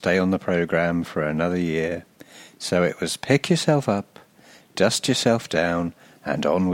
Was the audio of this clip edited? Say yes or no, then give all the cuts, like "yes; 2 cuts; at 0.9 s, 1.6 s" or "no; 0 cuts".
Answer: no; 0 cuts